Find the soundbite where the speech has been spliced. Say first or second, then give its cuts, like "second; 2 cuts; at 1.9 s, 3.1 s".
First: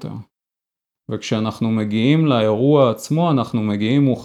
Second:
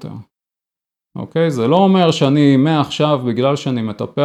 first; 1 cut; at 1.0 s